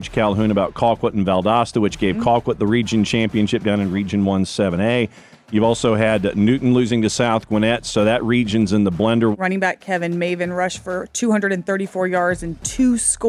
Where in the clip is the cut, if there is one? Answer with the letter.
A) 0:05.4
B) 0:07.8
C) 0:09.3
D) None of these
C